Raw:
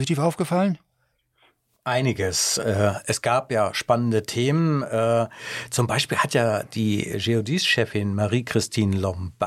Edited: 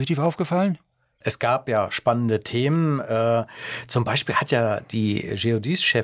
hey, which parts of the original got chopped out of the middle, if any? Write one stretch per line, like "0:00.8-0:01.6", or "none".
0:01.2-0:03.0